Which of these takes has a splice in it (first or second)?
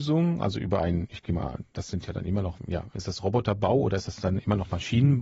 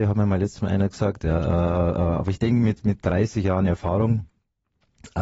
first